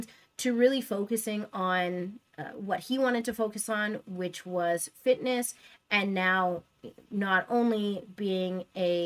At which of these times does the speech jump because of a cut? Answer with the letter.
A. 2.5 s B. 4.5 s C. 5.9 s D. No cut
D